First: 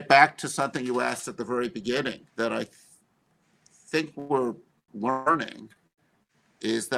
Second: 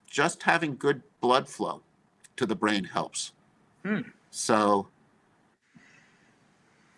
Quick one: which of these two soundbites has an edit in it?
first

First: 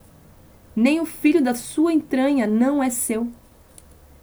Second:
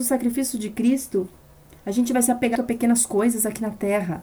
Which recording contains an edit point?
second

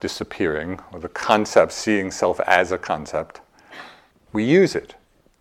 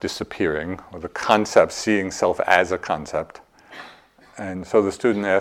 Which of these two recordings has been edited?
first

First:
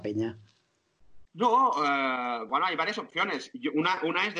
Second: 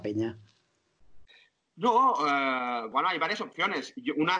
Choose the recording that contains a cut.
first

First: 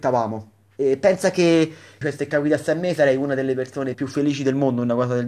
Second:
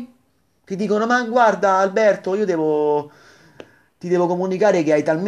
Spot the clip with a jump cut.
first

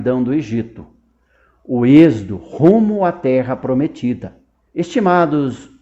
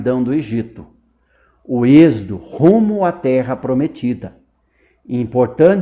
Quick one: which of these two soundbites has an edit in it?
first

